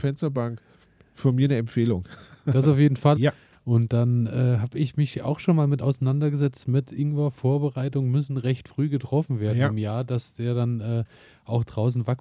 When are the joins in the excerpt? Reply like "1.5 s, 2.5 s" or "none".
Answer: 3.2 s, 6.6 s